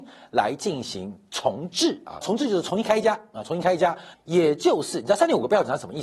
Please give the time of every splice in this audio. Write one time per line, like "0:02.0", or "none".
0:02.2
0:04.1